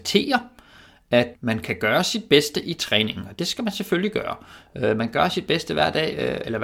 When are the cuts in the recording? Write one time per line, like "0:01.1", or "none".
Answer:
0:01.3